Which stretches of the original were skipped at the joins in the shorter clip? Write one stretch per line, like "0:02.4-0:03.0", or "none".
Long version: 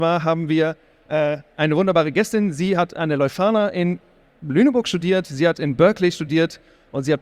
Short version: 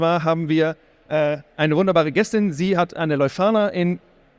none